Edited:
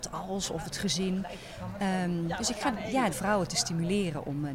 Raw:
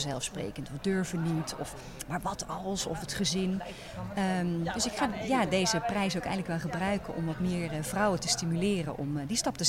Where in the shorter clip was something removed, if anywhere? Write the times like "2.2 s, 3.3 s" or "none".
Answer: 3.1 s